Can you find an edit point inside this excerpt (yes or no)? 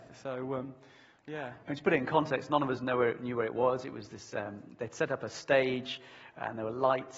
no